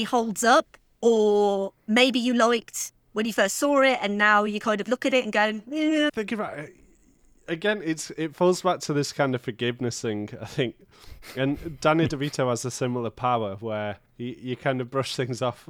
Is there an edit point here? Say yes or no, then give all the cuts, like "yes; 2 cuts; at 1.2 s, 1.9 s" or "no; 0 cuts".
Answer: yes; 2 cuts; at 6.1 s, 14.1 s